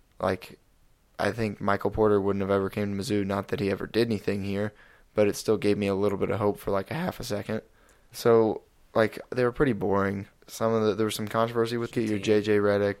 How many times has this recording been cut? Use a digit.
3